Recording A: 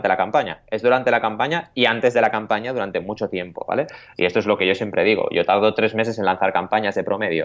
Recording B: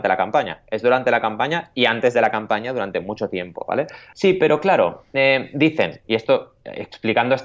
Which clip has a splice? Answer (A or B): B